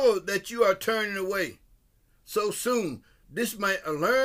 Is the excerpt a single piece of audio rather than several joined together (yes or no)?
no